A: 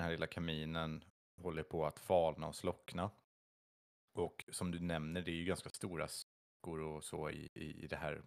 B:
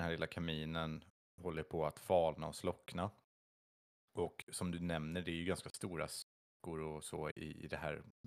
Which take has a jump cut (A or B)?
B